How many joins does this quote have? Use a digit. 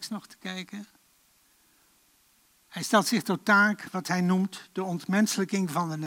0